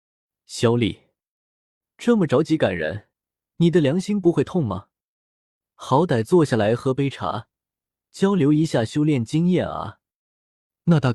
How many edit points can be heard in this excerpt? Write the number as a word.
zero